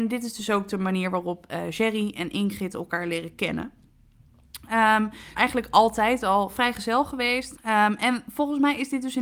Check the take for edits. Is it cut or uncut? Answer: cut